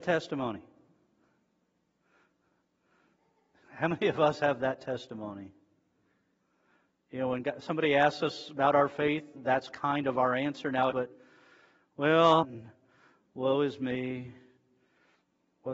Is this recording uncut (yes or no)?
no